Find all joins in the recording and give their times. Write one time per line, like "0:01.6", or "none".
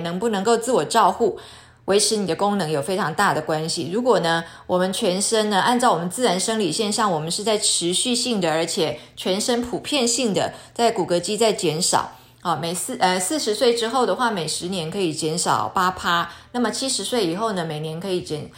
none